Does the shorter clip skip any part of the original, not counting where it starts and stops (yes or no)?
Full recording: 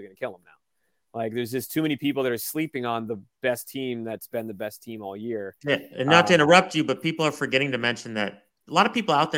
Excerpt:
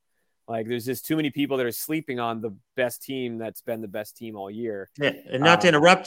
no